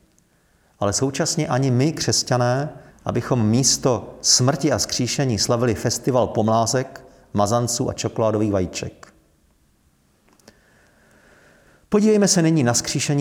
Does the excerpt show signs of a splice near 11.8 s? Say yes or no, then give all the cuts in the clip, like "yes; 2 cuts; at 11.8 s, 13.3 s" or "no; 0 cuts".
no; 1 cut; at 2.9 s